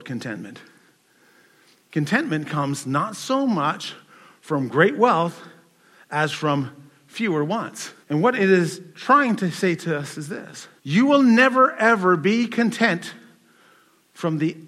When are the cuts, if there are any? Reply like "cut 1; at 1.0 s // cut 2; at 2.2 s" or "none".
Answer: cut 1; at 8.0 s // cut 2; at 10.8 s